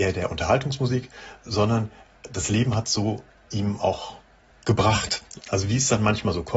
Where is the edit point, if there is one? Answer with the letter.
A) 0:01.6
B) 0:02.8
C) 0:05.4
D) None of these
C